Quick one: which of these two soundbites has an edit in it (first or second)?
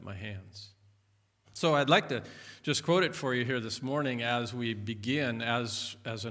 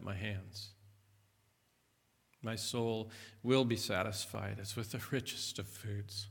first